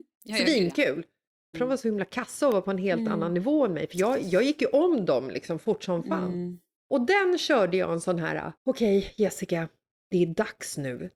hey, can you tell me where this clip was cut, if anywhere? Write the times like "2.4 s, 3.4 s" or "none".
1.5 s, 8.6 s